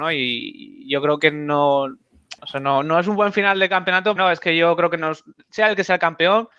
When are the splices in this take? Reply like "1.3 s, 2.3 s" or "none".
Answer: 2.4 s, 4.2 s